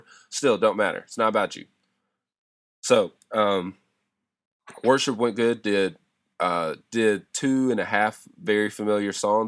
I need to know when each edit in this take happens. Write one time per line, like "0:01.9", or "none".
none